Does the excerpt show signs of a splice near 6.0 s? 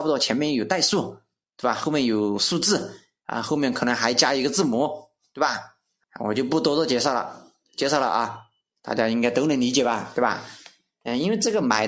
yes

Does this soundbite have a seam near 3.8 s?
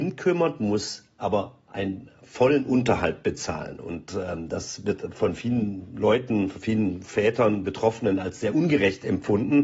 no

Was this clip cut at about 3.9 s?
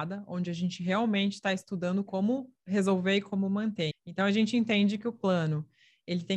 yes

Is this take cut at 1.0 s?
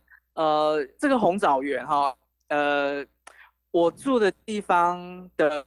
yes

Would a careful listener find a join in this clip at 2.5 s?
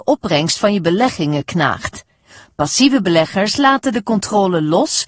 no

